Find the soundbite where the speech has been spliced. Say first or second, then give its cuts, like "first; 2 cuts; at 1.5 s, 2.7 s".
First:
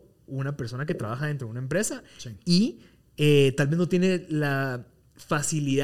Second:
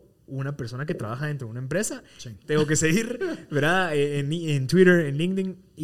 second; 1 cut; at 2.4 s